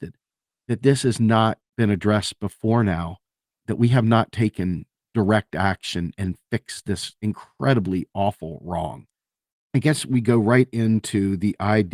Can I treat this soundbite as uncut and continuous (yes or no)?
no